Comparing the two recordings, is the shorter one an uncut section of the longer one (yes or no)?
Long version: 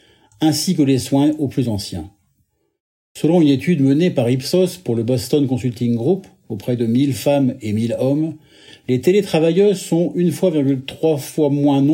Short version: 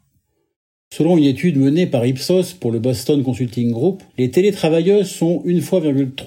no